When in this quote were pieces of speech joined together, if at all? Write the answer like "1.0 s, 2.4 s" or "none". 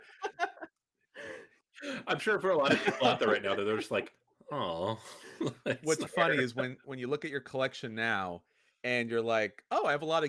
6.1 s